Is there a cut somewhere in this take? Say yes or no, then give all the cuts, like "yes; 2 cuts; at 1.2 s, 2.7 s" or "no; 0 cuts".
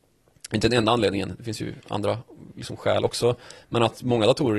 no; 0 cuts